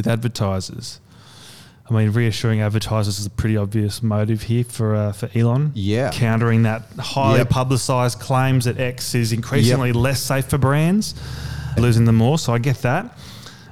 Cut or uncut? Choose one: cut